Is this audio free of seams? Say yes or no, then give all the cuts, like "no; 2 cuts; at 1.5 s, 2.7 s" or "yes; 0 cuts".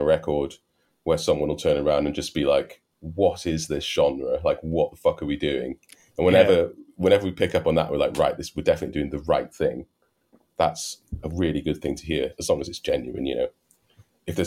no; 1 cut; at 2.9 s